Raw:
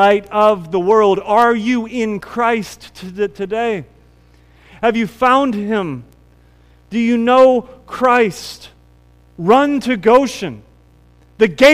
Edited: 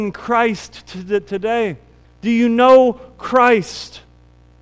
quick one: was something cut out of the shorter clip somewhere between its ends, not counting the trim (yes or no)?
yes